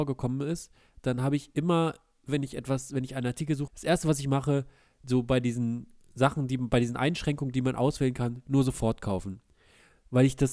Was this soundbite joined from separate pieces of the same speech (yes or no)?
yes